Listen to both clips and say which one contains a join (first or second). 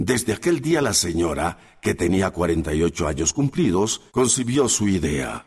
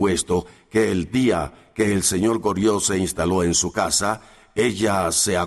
first